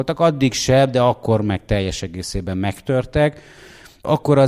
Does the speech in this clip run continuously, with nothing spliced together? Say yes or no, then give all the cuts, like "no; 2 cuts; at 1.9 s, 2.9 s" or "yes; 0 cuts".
yes; 0 cuts